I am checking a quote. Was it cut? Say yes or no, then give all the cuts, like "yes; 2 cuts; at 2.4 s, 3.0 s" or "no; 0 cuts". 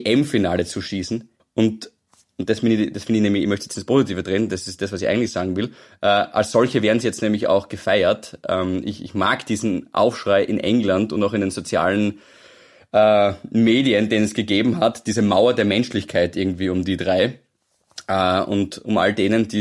yes; 1 cut; at 1.4 s